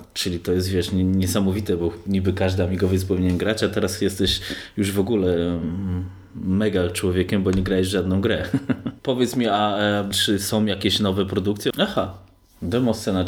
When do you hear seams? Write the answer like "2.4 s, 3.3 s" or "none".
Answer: 9.0 s, 10.1 s, 11.7 s